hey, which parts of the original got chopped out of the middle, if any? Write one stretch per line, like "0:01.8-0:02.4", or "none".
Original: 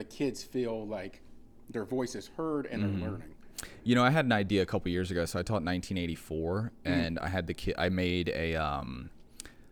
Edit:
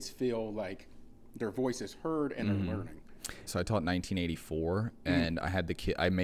0:03.8-0:05.3

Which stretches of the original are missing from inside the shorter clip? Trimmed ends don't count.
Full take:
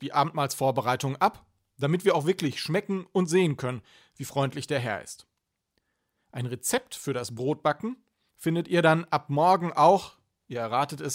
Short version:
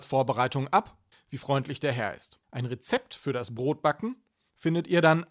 0:01.6-0:04.0
0:05.3-0:06.2

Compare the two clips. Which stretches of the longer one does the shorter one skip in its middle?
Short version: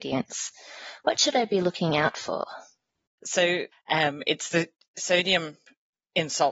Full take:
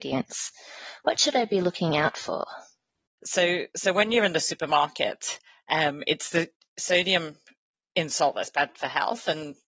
0:03.7-0:05.5

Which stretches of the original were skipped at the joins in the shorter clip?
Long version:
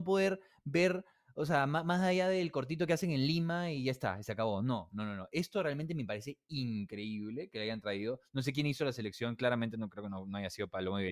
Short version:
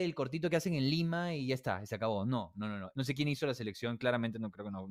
0:05.3-0:08.3

